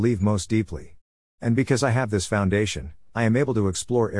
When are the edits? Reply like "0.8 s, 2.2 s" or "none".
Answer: 1.2 s